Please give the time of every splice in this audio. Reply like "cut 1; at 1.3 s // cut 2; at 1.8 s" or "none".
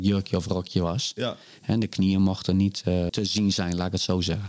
cut 1; at 3.1 s